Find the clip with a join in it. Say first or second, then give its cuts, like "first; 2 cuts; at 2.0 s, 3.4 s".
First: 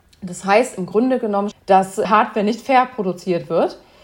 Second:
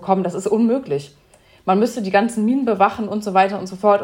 first; 1 cut; at 1.5 s